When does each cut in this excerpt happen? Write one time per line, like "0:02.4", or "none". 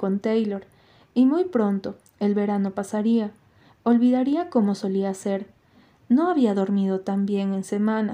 0:06.0